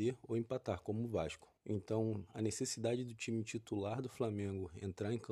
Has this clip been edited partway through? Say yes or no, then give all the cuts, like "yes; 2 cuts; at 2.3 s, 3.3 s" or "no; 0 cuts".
yes; 1 cut; at 1.6 s